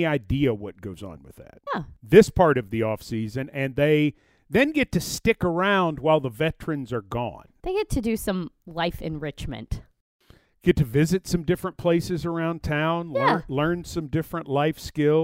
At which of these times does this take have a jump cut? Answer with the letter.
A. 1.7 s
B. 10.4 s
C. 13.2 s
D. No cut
A